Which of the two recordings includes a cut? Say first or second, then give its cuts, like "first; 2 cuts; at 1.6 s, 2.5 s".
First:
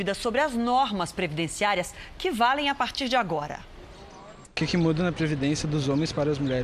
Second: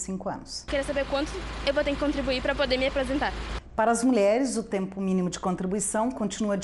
first; 1 cut; at 4.4 s